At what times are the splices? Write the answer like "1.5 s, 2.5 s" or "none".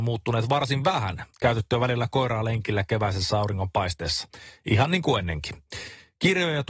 1.3 s

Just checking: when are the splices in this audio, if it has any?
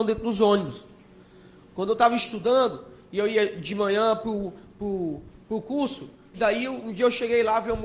6.3 s

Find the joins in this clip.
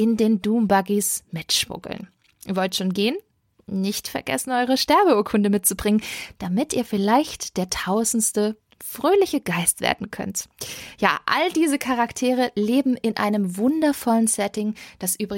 none

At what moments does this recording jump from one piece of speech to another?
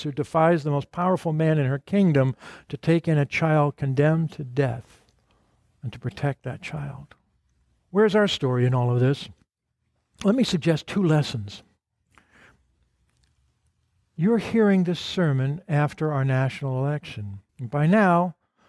7.8 s, 17.5 s

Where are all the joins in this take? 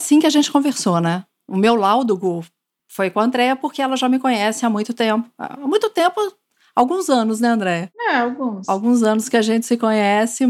none

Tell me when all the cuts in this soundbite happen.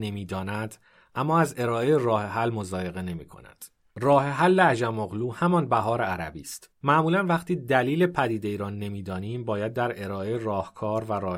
6.7 s

